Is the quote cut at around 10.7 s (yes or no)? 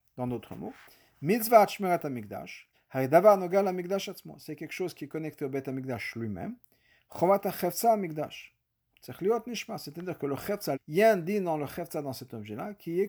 yes